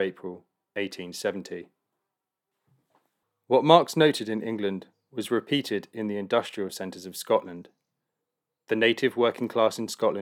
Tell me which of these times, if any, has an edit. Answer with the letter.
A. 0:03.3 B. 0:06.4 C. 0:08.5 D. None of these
D